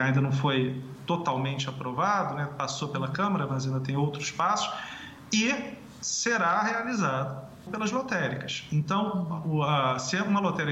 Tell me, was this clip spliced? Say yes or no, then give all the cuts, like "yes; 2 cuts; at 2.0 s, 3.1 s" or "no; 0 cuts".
yes; 1 cut; at 7.7 s